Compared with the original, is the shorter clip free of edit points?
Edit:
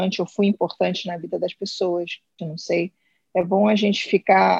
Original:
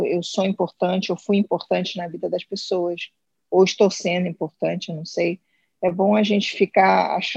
no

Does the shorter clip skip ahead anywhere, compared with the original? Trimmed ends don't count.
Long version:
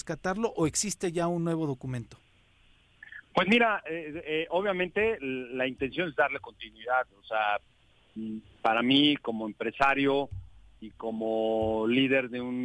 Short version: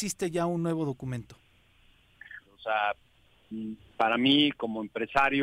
yes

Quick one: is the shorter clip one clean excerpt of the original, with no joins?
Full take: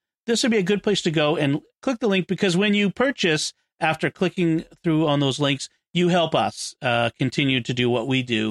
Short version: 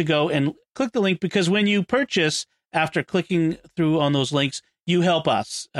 yes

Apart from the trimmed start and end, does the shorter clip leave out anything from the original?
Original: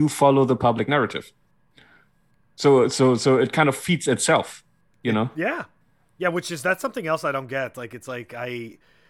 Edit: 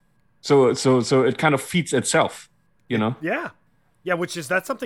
no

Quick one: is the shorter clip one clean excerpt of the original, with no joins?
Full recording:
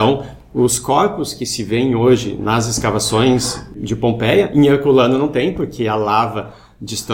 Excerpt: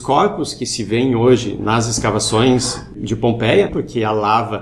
no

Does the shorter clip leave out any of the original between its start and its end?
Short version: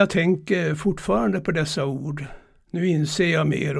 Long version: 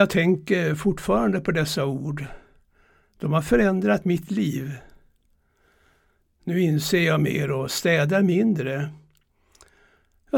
yes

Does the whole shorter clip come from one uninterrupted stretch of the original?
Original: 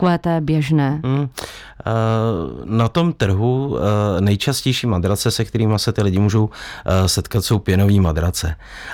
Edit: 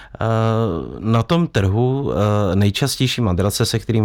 yes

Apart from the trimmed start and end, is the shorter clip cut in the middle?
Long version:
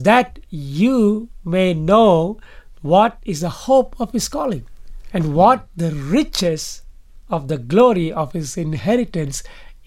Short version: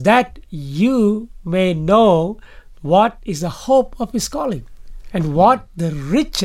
no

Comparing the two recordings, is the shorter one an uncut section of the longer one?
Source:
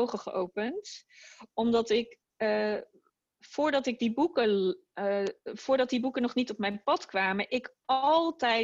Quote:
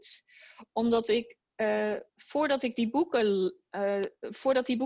no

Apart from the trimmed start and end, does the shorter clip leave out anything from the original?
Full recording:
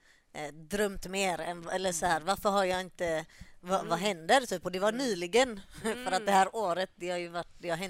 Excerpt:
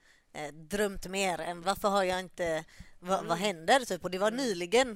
yes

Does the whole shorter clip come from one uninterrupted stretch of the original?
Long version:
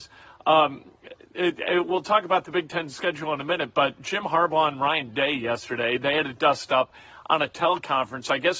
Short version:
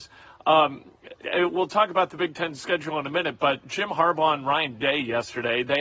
no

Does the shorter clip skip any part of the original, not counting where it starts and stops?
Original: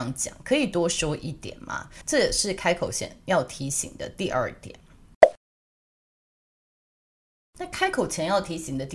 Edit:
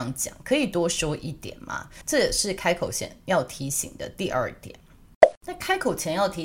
yes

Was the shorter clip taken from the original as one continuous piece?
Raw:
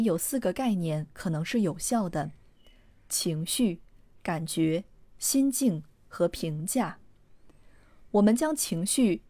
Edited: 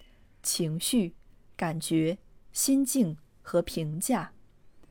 yes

